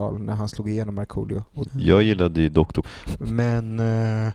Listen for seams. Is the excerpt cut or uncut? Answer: cut